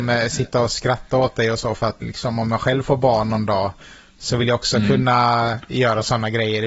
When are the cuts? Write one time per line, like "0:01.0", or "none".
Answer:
0:02.0